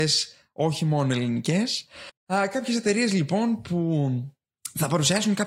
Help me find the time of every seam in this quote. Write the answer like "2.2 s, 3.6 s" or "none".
none